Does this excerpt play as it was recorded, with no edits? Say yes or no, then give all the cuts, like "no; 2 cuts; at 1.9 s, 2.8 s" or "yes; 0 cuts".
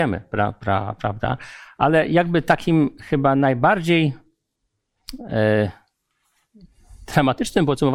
yes; 0 cuts